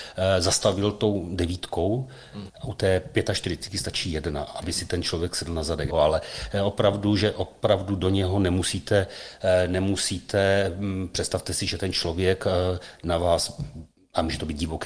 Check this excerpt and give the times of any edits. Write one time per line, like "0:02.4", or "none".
0:02.5
0:05.9